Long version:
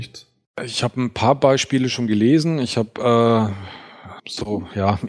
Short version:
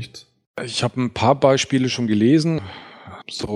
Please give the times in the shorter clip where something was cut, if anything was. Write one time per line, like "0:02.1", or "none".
0:02.6